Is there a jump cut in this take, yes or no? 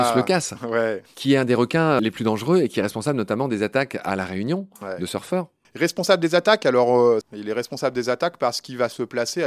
yes